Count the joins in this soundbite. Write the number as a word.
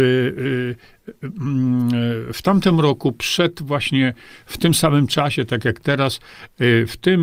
zero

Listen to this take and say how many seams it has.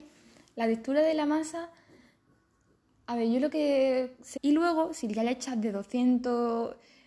one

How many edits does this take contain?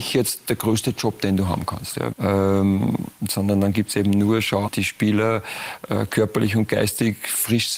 two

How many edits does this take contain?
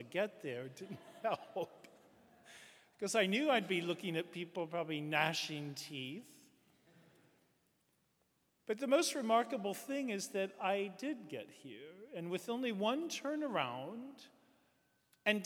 zero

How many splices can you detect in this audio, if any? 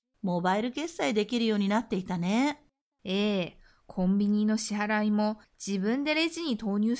one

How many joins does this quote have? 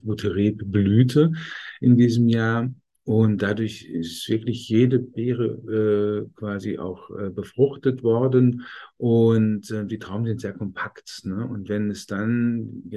zero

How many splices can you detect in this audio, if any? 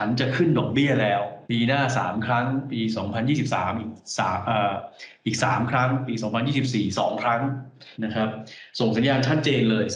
two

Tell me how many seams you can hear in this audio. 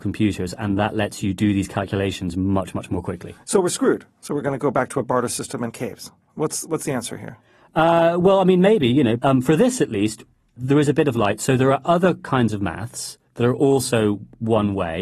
zero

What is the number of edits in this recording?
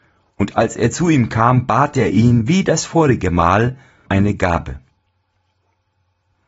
one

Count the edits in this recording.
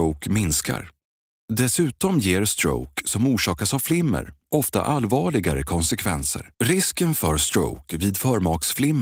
two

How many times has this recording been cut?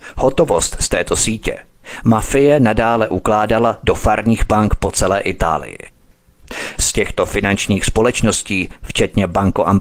zero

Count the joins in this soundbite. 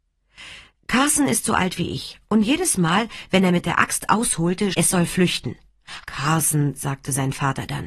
two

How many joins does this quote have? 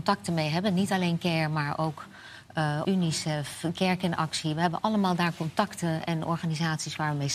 one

